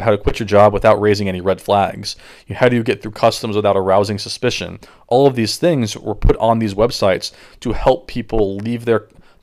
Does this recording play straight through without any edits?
yes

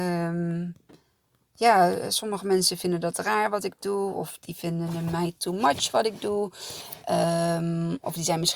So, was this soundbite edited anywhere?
no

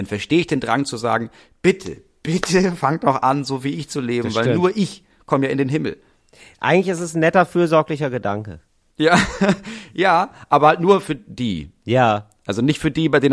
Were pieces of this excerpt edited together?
no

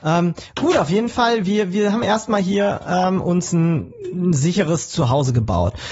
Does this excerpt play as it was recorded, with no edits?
yes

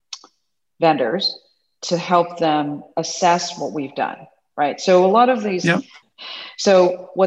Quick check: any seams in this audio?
yes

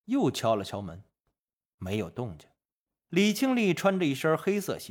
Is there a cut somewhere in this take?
yes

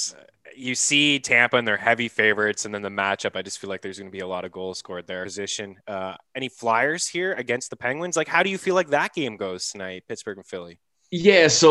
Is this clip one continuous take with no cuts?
no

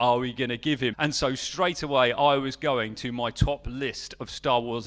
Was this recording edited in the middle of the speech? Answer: yes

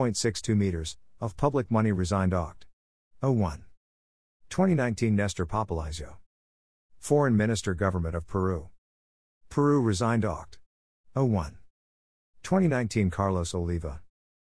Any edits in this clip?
no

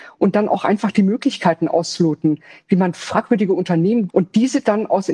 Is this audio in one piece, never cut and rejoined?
no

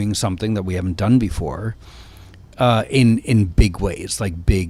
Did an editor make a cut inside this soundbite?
no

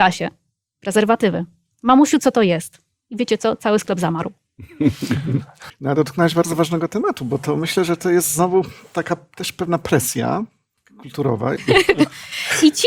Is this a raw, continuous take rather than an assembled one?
no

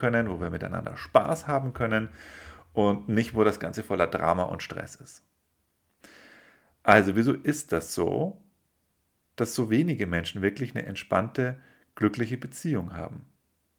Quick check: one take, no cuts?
yes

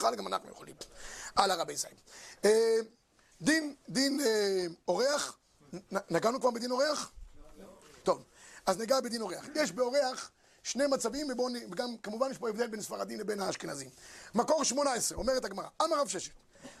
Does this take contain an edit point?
no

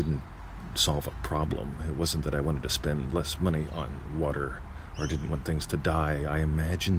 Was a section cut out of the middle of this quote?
no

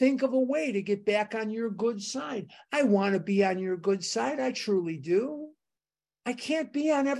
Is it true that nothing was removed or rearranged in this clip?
no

